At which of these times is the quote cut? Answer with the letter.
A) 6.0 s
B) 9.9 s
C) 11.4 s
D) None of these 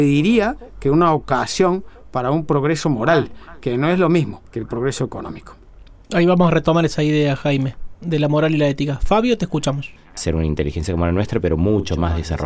B